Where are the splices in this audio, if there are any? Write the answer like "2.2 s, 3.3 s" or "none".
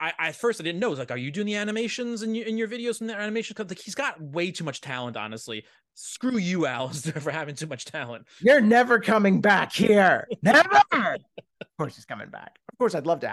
none